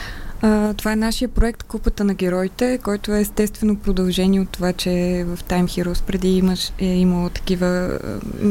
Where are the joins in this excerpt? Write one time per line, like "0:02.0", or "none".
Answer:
none